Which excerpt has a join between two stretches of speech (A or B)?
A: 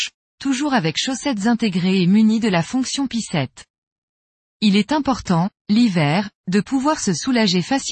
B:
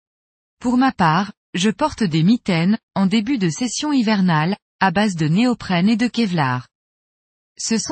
B